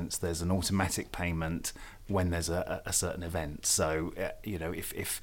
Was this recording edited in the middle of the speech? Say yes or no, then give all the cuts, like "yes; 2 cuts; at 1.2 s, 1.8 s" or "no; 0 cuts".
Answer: no; 0 cuts